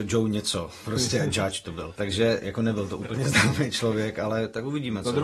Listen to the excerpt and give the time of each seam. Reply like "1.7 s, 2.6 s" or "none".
none